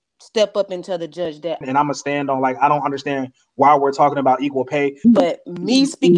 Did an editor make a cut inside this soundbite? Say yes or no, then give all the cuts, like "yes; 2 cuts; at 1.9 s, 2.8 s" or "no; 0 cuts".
yes; 2 cuts; at 1.6 s, 5.0 s